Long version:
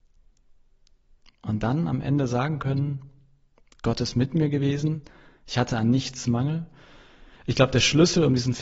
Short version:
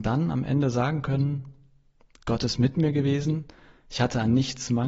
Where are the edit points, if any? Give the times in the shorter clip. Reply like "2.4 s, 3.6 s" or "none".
none